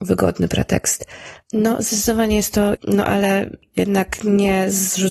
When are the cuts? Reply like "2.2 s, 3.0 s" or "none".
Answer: 1.4 s, 2.7 s